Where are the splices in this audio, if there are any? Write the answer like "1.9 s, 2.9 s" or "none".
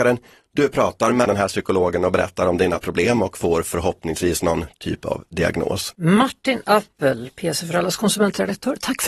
none